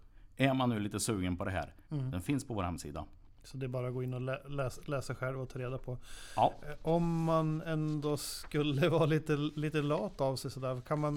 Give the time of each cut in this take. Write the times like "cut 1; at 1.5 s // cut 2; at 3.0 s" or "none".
cut 1; at 1.9 s